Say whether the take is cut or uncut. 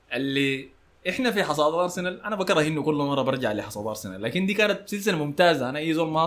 uncut